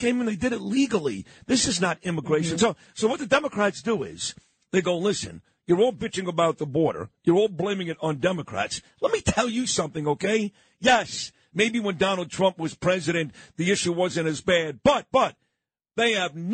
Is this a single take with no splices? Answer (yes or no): yes